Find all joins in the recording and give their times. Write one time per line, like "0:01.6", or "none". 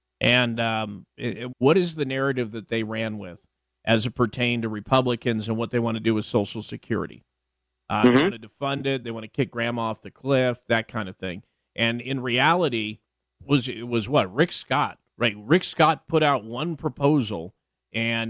0:01.5
0:13.4